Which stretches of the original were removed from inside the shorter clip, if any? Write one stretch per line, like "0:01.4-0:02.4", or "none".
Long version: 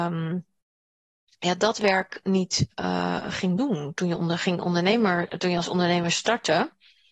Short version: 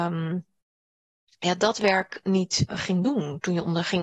0:02.7-0:03.2